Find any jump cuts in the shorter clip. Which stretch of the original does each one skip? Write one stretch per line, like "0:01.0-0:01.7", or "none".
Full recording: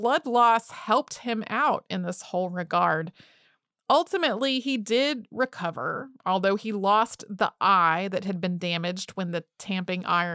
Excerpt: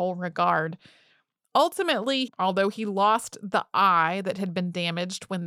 0:04.6-0:06.1